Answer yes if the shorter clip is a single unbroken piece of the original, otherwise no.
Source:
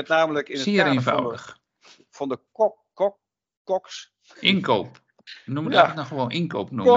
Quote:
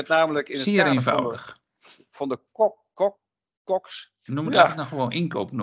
no